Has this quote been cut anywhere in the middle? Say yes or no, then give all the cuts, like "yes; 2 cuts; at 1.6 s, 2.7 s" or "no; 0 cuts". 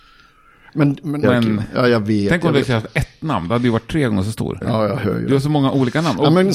yes; 2 cuts; at 1.2 s, 4.6 s